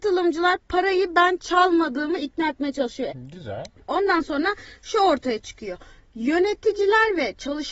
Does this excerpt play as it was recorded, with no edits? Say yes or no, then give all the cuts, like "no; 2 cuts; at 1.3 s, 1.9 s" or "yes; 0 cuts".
no; 1 cut; at 3.1 s